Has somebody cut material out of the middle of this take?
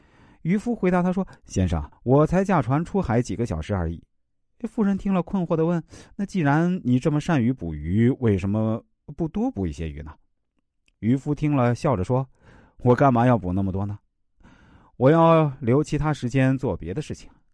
yes; 1 cut; at 1.9 s

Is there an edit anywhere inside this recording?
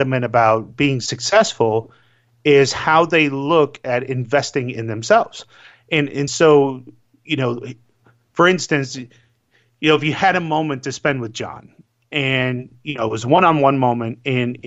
no; 0 cuts

